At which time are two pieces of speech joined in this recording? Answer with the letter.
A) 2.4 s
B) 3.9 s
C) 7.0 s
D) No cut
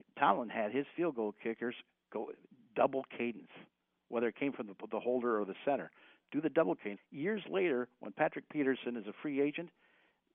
C